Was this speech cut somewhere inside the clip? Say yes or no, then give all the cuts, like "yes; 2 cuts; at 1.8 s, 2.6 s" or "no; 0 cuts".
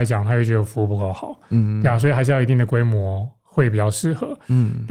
no; 0 cuts